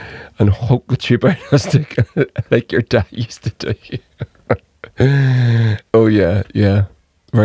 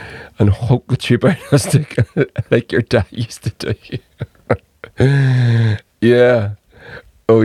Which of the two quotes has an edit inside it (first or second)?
first